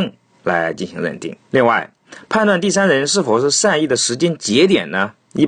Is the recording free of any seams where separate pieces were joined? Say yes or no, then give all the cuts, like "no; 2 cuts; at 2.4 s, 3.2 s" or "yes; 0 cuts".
no; 1 cut; at 1.5 s